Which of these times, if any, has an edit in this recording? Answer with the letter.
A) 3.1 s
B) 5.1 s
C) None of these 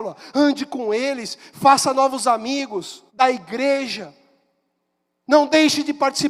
A